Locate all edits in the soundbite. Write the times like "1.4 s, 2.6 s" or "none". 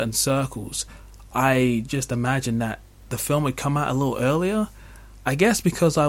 none